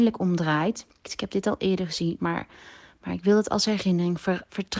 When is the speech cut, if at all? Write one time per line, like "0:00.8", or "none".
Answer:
0:01.0
0:02.2